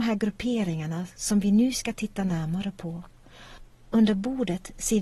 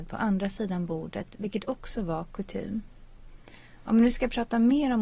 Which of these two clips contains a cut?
first; 1 cut; at 3.8 s

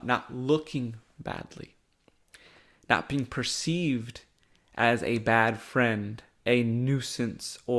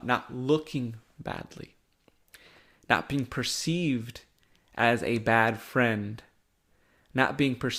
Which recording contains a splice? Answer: first; 1 cut; at 6.4 s

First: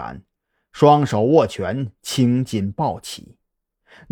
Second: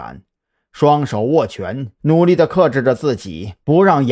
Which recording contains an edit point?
second; 1 cut; at 2.0 s

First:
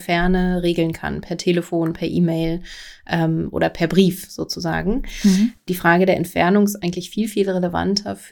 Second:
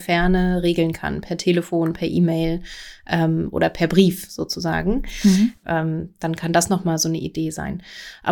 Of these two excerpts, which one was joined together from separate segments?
second; 1 cut; at 5.6 s

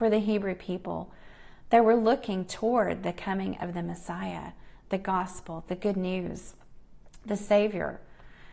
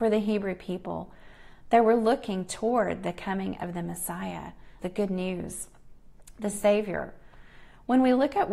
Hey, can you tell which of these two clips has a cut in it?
second; 1 cut; at 4.8 s

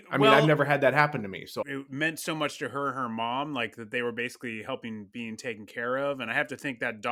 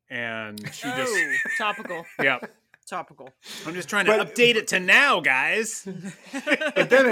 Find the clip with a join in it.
first; 1 cut; at 1.6 s

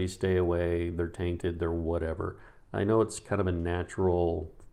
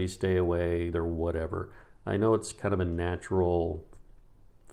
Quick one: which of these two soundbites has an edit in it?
second; 1 cut; at 0.9 s

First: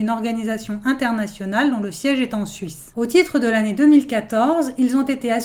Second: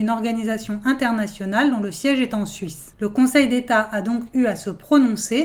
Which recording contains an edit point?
second; 1 cut; at 2.9 s

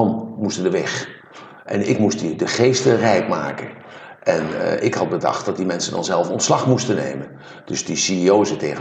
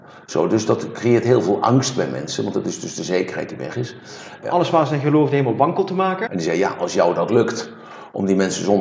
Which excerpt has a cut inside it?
second; 2 cuts; at 4.4 s, 6.3 s

